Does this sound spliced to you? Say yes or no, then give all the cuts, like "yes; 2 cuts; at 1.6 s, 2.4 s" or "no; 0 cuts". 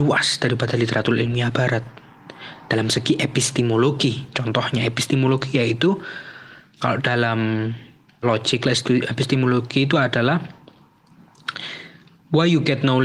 yes; 1 cut; at 8.2 s